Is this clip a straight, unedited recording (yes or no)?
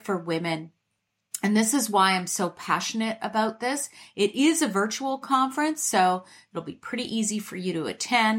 yes